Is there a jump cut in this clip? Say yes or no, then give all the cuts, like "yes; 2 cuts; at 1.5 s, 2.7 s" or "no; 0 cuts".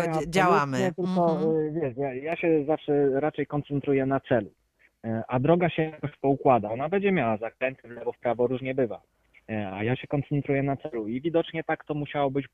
no; 0 cuts